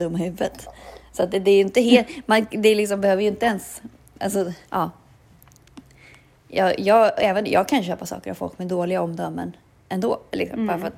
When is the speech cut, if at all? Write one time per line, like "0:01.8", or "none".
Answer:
0:04.7